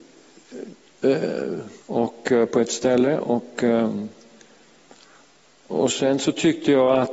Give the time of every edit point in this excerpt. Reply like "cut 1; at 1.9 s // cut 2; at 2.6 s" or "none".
cut 1; at 1.8 s